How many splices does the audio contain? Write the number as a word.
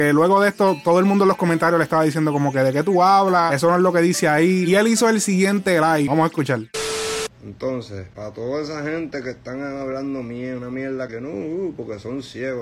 one